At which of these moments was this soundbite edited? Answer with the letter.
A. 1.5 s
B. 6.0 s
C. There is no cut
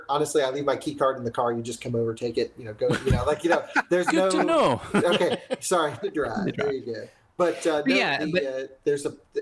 B